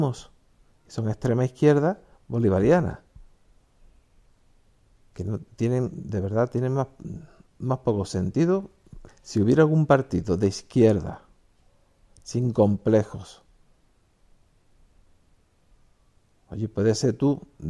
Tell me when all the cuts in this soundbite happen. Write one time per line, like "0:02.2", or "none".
0:09.1

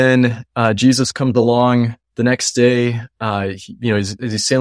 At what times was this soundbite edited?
none

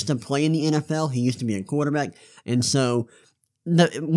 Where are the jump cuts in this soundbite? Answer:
0:02.4

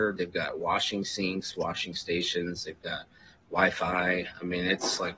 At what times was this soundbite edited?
none

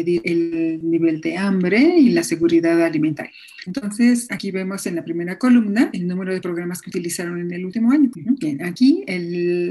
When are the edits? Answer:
0:03.6
0:08.1

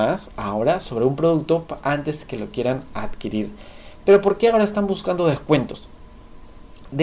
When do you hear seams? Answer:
none

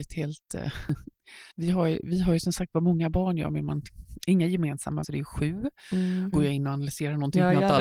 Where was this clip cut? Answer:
0:01.5
0:05.0
0:06.3

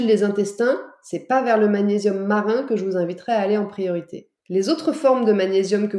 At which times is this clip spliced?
0:04.4

